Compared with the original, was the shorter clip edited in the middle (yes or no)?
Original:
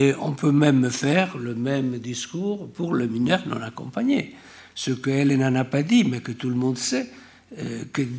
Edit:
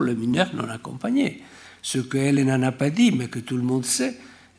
no